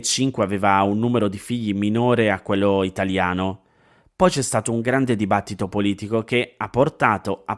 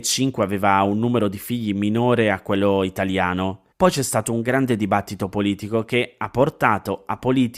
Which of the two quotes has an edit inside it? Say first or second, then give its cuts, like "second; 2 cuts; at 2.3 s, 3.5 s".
second; 1 cut; at 3.7 s